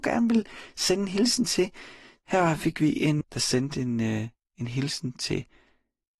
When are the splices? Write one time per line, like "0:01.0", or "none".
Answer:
0:03.2